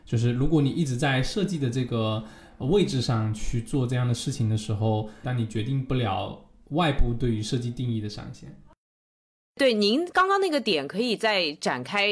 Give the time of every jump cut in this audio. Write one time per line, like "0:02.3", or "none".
0:05.2